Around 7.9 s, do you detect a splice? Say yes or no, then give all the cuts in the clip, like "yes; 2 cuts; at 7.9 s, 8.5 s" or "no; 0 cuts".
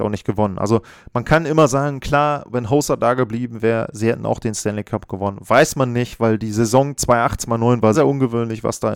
yes; 1 cut; at 7.9 s